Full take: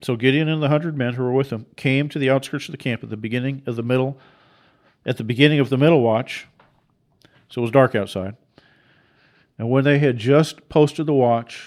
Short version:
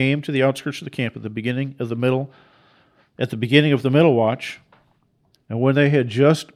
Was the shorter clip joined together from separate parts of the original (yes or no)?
yes